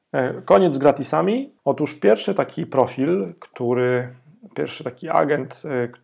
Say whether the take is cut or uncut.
cut